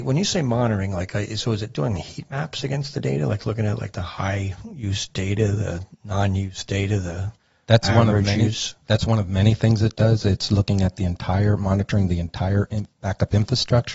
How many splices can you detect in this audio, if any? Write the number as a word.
zero